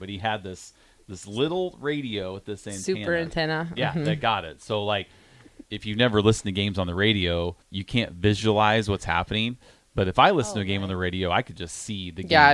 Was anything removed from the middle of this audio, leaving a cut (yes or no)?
yes